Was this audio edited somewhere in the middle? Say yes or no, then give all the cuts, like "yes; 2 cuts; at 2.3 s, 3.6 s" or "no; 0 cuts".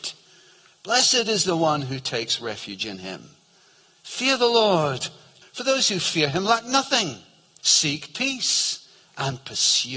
yes; 2 cuts; at 5.4 s, 7.6 s